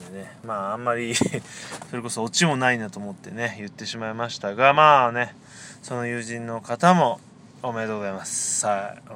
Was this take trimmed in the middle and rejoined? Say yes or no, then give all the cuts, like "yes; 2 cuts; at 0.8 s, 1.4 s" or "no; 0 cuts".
no; 0 cuts